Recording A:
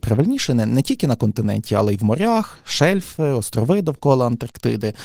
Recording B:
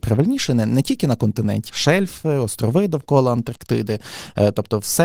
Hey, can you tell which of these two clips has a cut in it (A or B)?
B